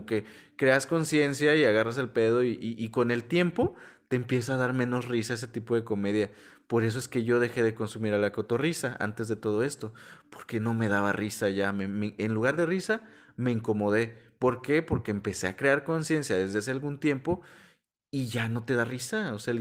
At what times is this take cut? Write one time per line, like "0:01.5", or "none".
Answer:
none

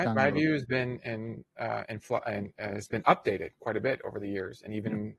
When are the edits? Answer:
none

